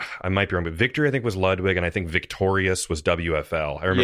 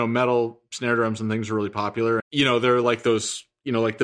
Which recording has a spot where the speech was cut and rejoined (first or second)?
second